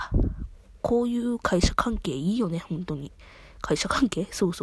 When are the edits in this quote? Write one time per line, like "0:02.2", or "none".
none